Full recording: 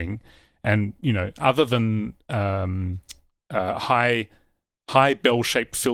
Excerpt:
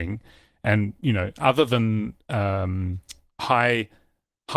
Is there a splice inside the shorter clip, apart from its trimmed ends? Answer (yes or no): yes